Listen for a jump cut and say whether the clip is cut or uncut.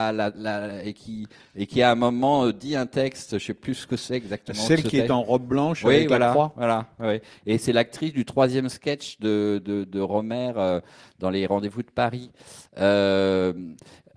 uncut